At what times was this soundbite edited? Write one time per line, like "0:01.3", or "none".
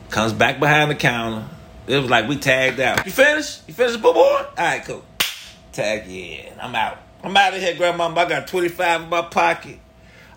0:03.0